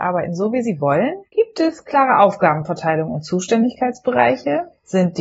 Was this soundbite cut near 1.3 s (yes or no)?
yes